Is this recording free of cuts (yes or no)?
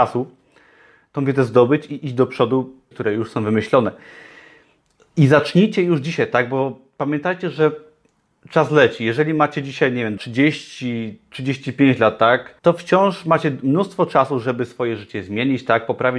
no